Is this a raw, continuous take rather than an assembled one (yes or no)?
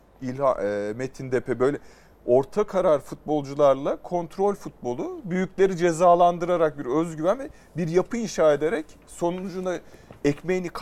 yes